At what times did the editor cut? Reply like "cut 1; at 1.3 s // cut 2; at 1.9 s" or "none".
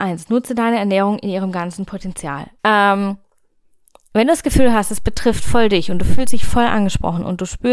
cut 1; at 2.6 s